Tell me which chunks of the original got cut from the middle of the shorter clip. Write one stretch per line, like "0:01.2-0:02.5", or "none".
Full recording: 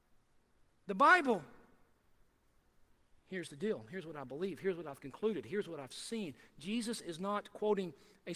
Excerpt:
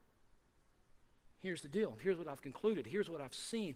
0:03.9-0:04.6